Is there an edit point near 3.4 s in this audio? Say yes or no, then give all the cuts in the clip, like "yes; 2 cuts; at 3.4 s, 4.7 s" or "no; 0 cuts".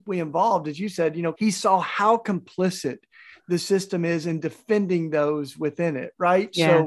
no; 1 cut; at 1.3 s